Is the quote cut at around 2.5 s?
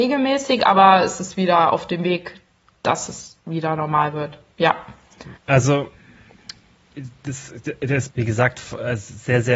no; 2 cuts; at 5.4 s, 8.1 s

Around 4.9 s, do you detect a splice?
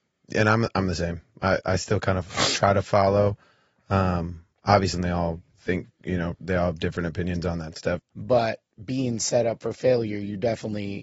yes; 2 cuts; at 4.9 s, 8.0 s

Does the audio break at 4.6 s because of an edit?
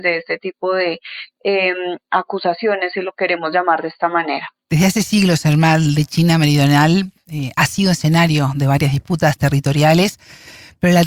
no; 0 cuts

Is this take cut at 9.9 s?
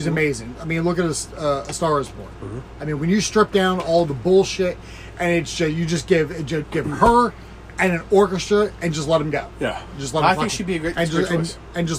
no; 1 cut; at 6.6 s

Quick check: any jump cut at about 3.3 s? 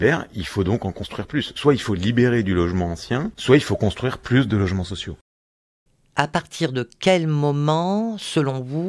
yes; 1 cut; at 3.3 s

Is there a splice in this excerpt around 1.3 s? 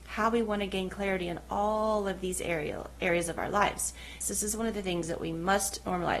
no; 1 cut; at 4.2 s

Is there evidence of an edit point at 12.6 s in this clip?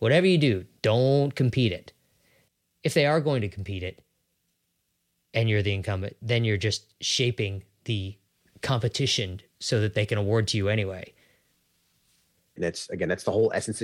yes; 1 cut; at 12.6 s

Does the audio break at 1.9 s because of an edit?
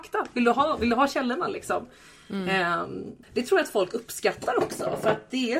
no; 1 cut; at 3.2 s

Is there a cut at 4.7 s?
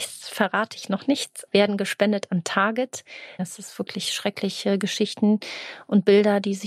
no; 2 cuts; at 1.5 s, 3.4 s

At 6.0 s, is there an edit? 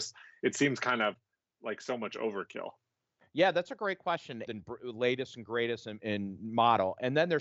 yes; 2 cuts; at 4.4 s, 6.0 s

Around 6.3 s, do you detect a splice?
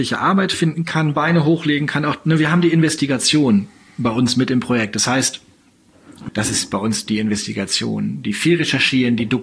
yes; 1 cut; at 6.3 s

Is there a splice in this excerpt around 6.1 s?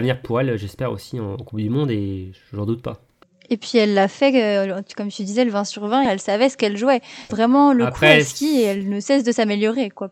yes; 2 cuts; at 6.1 s, 7.3 s

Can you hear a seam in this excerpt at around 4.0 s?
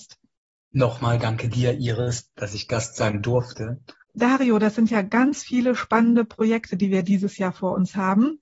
yes; 1 cut; at 4.0 s

